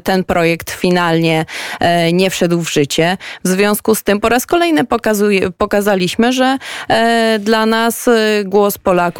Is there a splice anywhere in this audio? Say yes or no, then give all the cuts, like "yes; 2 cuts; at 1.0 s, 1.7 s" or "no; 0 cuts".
no; 0 cuts